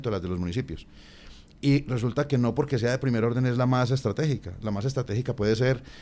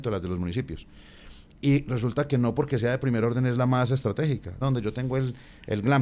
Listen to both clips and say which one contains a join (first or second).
second